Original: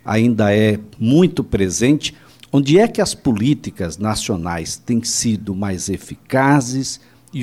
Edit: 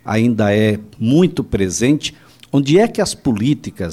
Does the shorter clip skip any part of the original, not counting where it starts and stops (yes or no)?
no